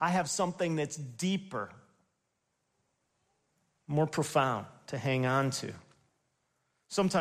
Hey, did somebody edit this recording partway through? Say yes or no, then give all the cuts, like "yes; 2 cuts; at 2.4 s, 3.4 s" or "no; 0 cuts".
no; 0 cuts